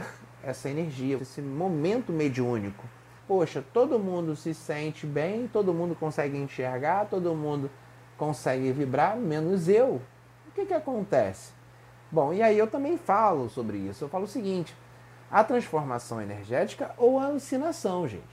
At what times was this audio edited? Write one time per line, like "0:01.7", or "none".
0:01.2
0:03.2